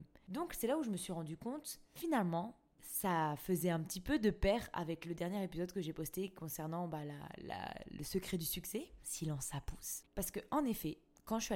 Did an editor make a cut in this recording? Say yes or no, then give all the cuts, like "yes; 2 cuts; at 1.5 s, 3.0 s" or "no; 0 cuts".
no; 0 cuts